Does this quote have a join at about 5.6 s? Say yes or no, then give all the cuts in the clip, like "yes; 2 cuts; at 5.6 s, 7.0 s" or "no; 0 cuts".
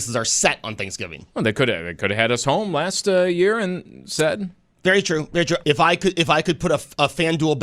yes; 1 cut; at 5.6 s